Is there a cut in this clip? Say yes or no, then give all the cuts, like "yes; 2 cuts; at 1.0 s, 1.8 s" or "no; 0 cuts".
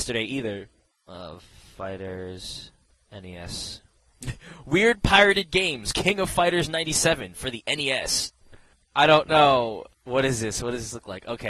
yes; 2 cuts; at 8.8 s, 9.9 s